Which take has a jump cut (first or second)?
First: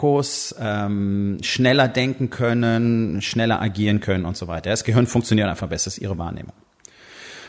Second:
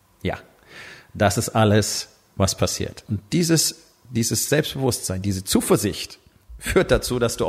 second